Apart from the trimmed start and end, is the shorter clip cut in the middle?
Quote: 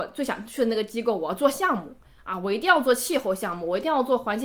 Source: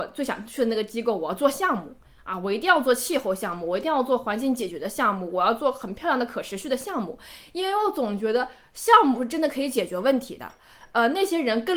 no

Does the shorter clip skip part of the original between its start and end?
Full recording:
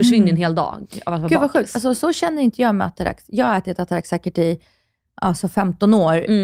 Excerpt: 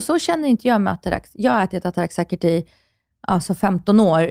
no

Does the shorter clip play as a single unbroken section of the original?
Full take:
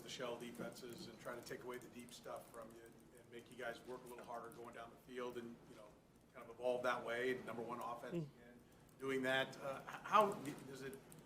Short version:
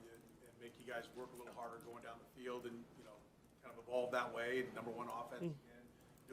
yes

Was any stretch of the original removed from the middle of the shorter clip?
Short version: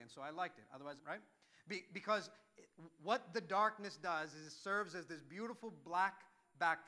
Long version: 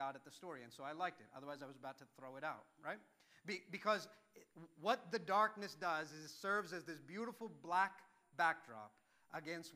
yes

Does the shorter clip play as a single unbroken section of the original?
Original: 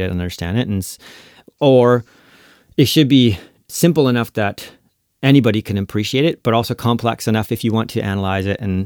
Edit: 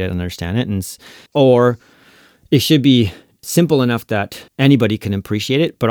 no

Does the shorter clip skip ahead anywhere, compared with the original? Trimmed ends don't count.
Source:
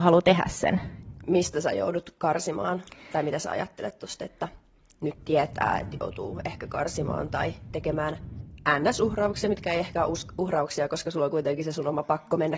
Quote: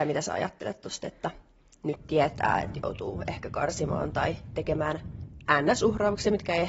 no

